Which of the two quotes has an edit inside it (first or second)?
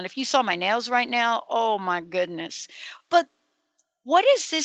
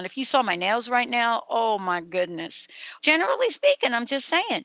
second